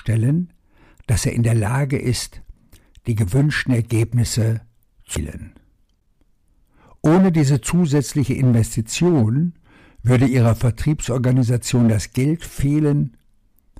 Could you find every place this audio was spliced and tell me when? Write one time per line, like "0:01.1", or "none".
none